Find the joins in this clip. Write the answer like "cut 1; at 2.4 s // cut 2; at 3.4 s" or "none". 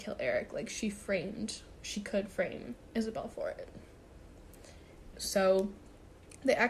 cut 1; at 5.1 s